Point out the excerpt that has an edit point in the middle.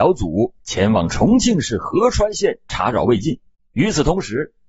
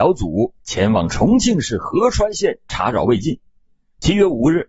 first; 1 cut; at 3.5 s

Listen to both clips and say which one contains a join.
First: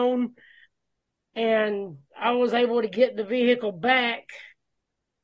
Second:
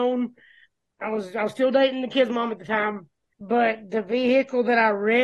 second; 2 cuts; at 0.9 s, 3.3 s

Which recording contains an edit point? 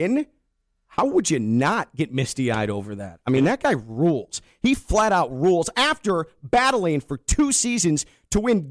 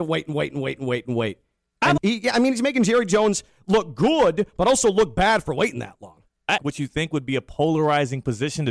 second; 2 cuts; at 2.0 s, 6.6 s

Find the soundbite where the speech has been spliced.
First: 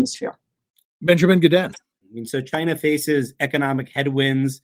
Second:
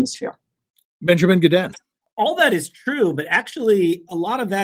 first; 1 cut; at 2.0 s

